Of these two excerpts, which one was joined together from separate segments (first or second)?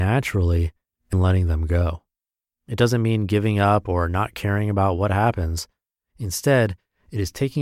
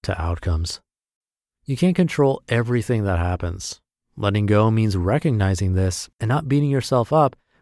first